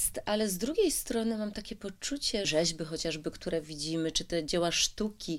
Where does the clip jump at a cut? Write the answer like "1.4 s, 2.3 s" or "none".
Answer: 2.4 s